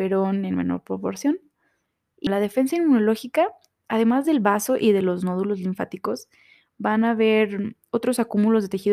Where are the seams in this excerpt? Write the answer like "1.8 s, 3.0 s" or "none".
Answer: 2.3 s